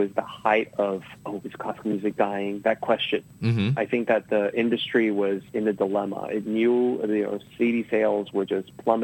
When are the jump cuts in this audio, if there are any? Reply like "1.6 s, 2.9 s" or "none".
1.2 s

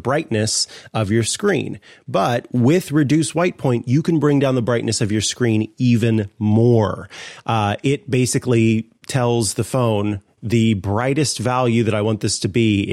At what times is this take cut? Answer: none

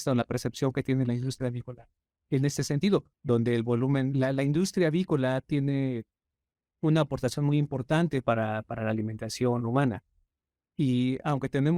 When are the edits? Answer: 3.1 s

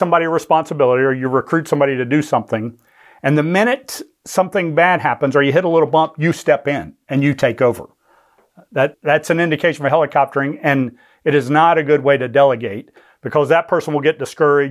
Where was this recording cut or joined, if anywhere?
8.9 s

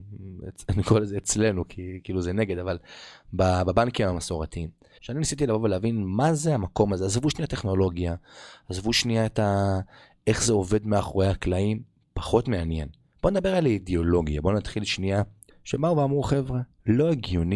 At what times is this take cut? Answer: 5.0 s, 15.5 s

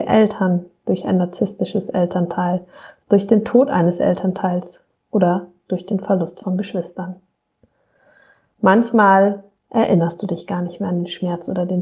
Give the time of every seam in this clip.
3.0 s

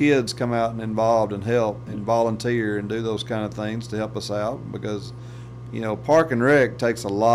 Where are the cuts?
1.9 s

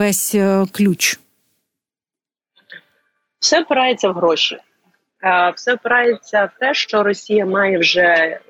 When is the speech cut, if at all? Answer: none

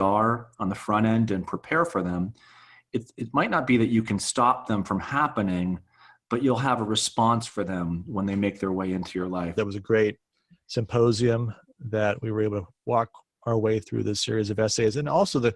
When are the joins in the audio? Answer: 9.6 s

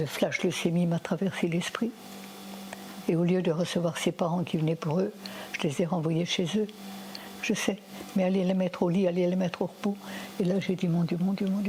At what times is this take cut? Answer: 7.4 s

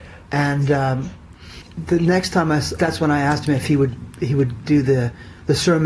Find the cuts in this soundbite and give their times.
2.8 s

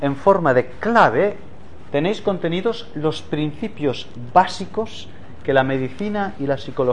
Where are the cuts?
1.9 s

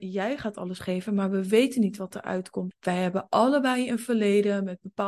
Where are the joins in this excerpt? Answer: 2.7 s

